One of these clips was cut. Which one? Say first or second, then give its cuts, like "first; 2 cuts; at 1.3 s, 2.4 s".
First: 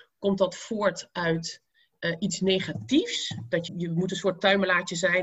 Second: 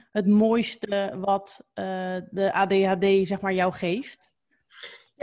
first; 1 cut; at 3.7 s